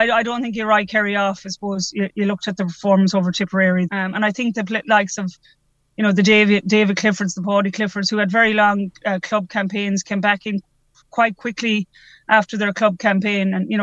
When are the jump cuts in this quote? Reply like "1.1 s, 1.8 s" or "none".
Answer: 3.9 s